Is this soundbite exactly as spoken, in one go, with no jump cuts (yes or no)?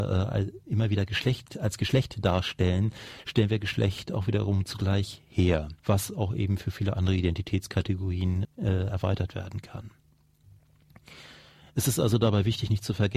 no